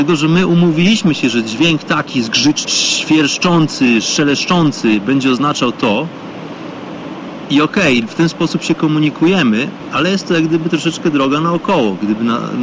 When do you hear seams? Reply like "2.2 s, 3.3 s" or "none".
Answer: 2.6 s